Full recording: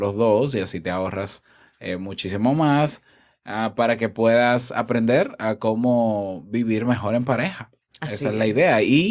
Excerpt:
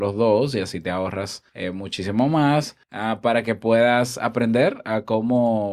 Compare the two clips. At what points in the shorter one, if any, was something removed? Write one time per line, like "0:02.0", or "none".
0:01.5
0:02.8